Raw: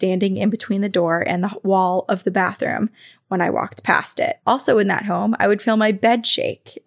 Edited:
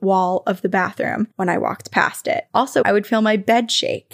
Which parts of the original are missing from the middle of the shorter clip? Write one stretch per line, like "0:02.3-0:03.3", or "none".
0:02.9-0:03.2
0:04.7-0:05.4